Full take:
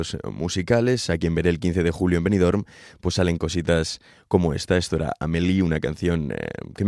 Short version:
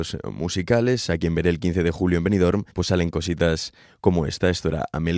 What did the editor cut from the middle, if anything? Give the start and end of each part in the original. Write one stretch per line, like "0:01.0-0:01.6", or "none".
0:02.7-0:03.0